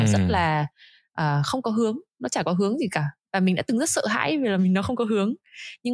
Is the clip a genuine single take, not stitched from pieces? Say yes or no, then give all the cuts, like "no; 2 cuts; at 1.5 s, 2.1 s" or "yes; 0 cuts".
no; 1 cut; at 4.6 s